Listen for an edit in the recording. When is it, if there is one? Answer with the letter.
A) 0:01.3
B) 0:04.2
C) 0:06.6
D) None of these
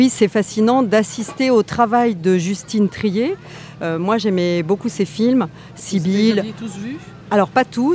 D